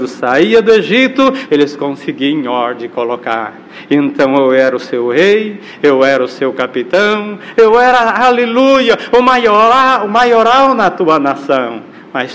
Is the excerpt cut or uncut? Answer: cut